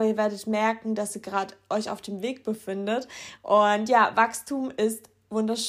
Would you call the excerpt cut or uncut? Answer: cut